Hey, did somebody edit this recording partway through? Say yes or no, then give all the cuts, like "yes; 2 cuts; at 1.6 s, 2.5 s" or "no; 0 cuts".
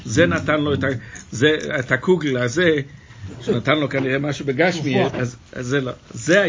yes; 1 cut; at 5.1 s